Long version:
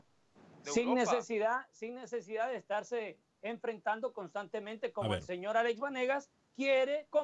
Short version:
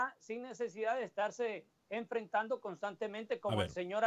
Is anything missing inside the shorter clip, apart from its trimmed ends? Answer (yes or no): no